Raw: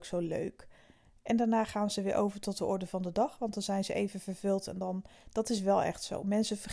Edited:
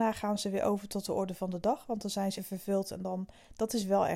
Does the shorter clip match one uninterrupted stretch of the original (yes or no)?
no